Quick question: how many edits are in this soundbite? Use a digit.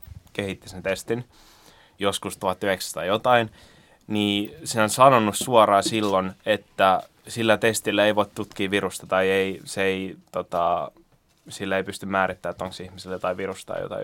0